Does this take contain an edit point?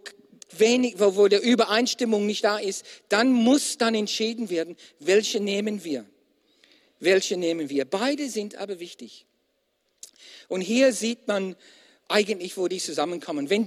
no; 0 cuts

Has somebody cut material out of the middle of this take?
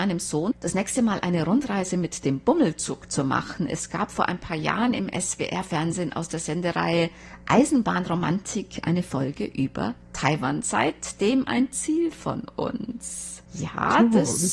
no; 0 cuts

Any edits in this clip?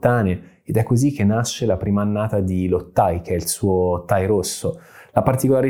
no; 0 cuts

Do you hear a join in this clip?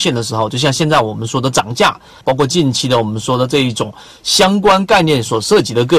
yes; 1 cut; at 2.2 s

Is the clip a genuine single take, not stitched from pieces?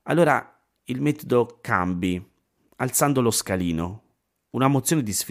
yes; 0 cuts

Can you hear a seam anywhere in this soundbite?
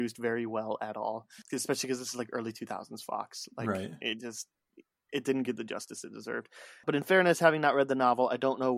no; 0 cuts

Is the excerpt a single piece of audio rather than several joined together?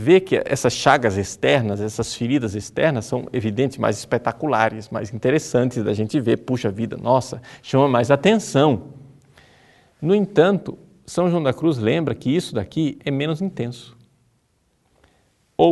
no; 1 cut; at 13.0 s

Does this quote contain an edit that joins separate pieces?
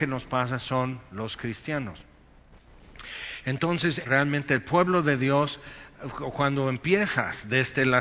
yes; 1 cut; at 4.0 s

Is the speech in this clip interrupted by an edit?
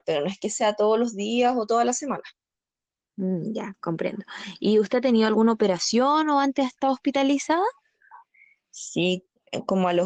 no; 0 cuts

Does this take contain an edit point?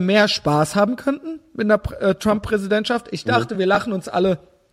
no; 0 cuts

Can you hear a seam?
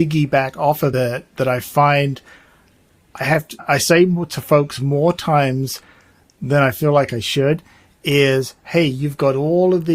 no; 0 cuts

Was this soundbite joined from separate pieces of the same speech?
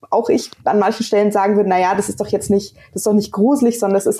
no; 0 cuts

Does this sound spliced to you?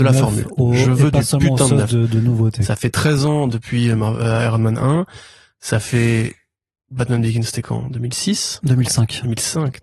no; 0 cuts

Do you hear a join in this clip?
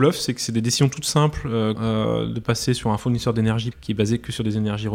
yes; 2 cuts; at 1.8 s, 3.7 s

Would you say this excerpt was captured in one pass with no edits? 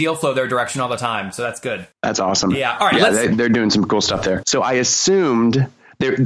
no; 2 cuts; at 1.9 s, 4.4 s

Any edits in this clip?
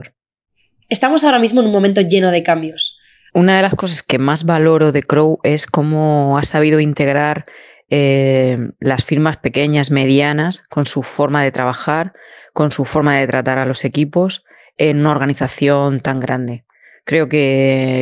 yes; 1 cut; at 3.3 s

